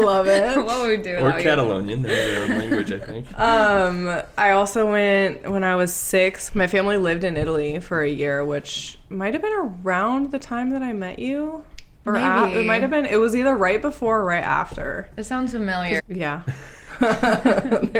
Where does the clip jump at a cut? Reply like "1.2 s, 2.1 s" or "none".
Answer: 6.5 s, 16.0 s